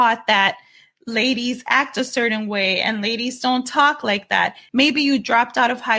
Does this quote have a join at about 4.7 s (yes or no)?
yes